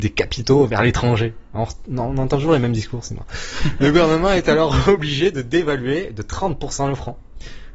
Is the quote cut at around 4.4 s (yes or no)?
no